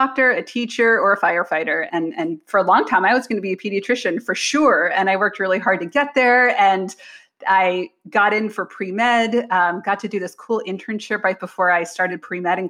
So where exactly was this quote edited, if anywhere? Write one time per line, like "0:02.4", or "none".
0:01.9